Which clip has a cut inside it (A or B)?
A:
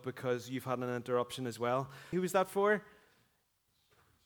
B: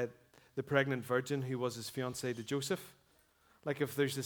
A